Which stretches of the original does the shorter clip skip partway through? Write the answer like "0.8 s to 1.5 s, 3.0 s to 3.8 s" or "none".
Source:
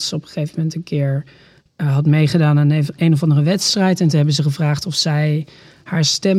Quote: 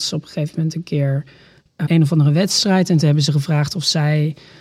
1.9 s to 3.0 s